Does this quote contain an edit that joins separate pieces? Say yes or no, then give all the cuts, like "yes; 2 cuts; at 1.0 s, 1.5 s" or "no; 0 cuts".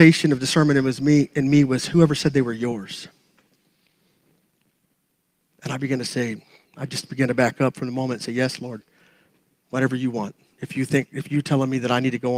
no; 0 cuts